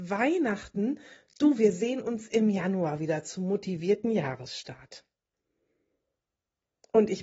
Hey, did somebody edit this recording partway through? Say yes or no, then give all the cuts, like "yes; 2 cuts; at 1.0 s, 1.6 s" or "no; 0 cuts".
no; 0 cuts